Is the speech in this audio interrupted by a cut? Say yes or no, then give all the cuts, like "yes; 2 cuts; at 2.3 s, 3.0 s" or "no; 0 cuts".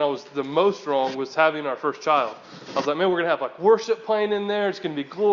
no; 0 cuts